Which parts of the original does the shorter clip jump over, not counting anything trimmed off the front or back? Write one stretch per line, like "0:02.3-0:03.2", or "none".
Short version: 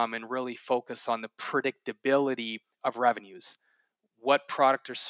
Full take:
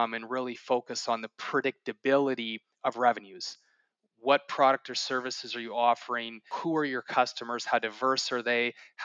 none